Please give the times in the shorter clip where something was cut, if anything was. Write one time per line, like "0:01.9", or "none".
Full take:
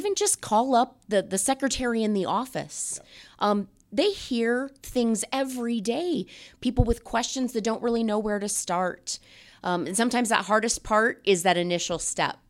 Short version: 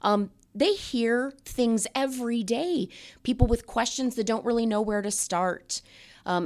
none